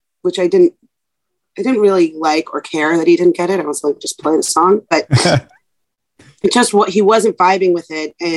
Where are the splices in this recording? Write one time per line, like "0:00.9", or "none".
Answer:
none